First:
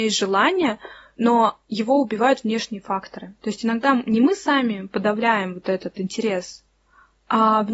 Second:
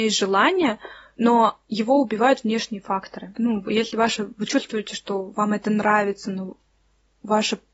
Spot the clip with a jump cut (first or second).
second